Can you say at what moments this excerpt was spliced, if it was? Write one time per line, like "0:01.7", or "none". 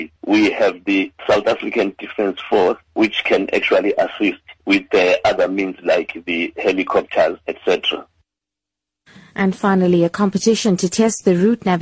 none